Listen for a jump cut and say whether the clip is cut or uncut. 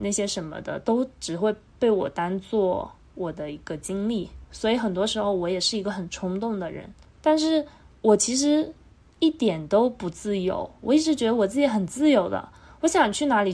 cut